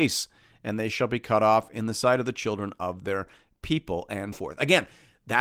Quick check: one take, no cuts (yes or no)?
no